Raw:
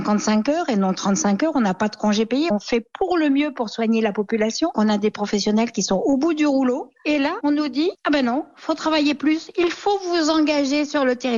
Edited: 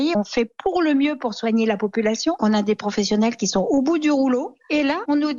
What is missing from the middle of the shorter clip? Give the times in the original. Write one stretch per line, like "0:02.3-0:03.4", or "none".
none